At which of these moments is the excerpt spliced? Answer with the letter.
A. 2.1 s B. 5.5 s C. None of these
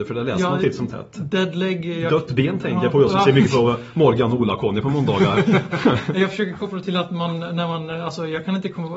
C